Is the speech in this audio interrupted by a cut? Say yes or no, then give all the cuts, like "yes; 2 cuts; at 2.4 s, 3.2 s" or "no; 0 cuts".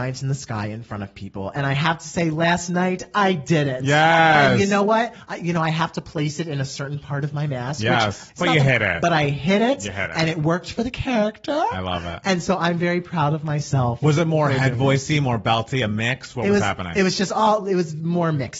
yes; 1 cut; at 8.3 s